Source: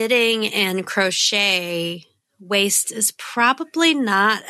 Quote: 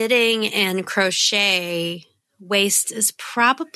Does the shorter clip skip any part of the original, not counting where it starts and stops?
no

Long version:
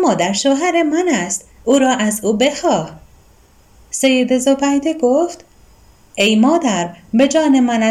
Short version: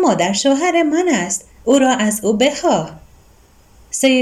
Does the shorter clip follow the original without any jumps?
yes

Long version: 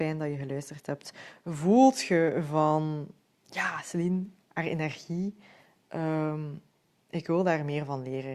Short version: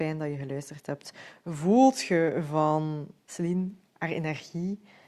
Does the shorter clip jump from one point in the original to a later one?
yes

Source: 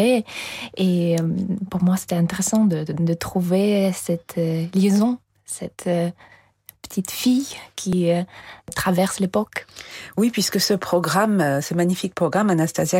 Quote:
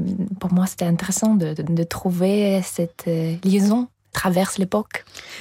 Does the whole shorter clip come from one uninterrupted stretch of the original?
no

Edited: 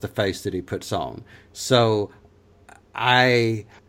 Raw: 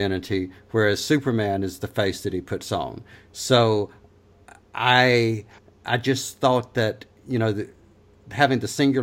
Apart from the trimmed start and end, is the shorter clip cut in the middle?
no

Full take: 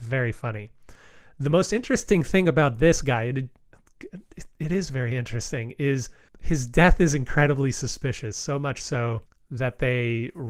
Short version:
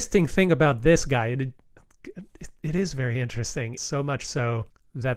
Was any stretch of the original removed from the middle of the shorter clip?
yes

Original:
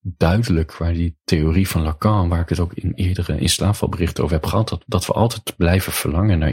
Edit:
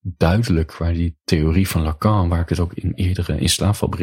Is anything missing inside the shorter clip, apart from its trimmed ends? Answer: no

